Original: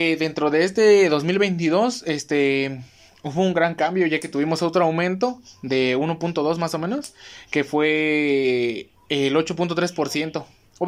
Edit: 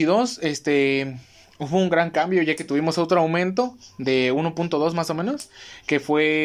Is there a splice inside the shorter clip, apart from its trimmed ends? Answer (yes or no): no